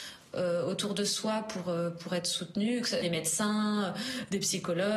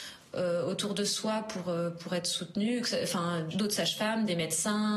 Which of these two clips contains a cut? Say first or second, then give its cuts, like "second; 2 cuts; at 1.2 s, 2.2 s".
first; 1 cut; at 3.0 s